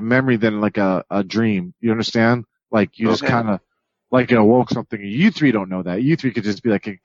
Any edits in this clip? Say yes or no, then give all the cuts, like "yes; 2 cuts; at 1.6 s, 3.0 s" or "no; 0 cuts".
no; 0 cuts